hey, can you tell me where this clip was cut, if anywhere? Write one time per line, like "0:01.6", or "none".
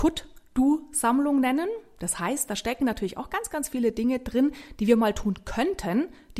none